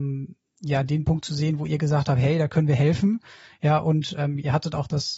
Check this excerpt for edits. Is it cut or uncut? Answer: uncut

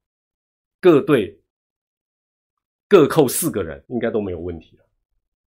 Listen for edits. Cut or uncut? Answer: cut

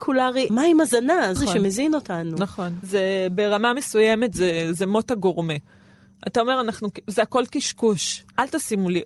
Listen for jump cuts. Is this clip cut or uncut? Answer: cut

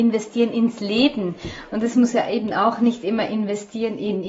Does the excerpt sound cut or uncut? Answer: uncut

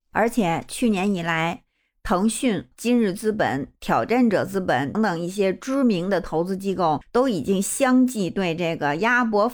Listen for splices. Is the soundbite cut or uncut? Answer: cut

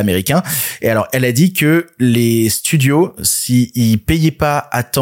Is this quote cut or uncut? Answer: uncut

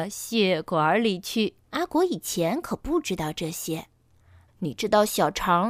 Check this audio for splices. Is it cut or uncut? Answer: cut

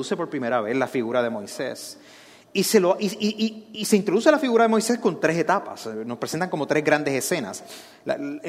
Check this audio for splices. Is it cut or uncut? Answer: uncut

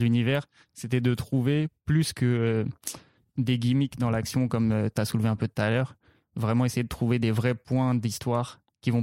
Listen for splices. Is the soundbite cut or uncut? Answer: uncut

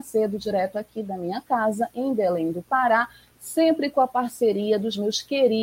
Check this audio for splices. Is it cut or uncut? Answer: uncut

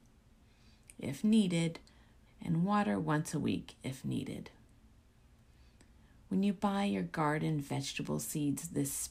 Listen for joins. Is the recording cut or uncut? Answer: cut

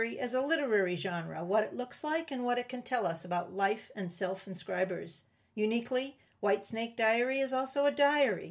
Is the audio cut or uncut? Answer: uncut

